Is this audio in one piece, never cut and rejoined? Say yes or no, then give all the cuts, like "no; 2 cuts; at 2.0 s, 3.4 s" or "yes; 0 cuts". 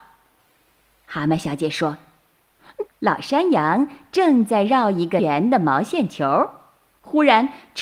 no; 2 cuts; at 2.9 s, 5.2 s